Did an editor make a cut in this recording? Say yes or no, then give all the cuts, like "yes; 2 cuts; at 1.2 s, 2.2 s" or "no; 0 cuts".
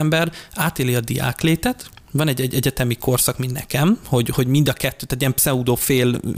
no; 0 cuts